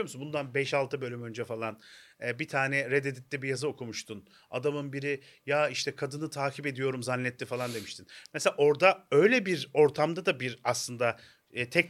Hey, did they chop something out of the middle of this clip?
no; 0 cuts

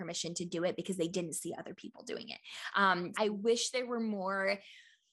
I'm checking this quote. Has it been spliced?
yes; 1 cut; at 3.1 s

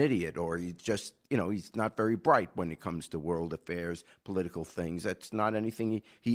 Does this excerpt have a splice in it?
no; 0 cuts

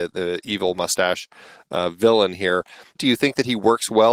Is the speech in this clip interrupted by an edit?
yes; 1 cut; at 3.0 s

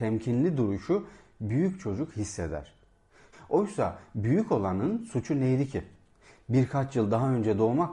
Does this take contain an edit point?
yes; 1 cut; at 3.3 s

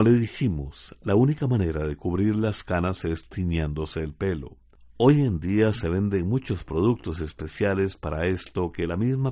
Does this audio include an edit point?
no; 0 cuts

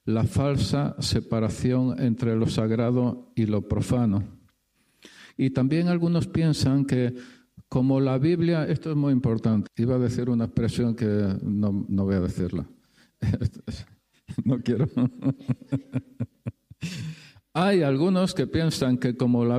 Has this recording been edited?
yes; 2 cuts; at 9.7 s, 14.4 s

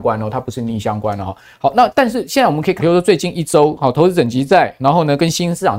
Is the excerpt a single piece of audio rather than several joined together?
no; 1 cut; at 2.8 s

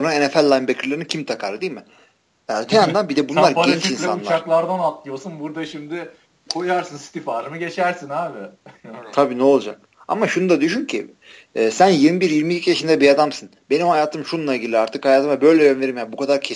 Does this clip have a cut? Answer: no; 0 cuts

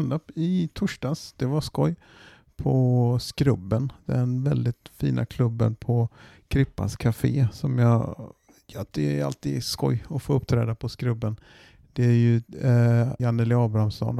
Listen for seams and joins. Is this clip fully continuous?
no; 1 cut; at 13.2 s

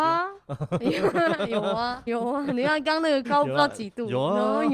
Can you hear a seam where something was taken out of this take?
yes; 2 cuts; at 2.1 s, 3.2 s

